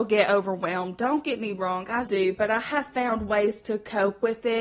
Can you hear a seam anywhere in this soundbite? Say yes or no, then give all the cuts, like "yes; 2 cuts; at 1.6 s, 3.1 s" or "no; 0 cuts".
yes; 1 cut; at 2.0 s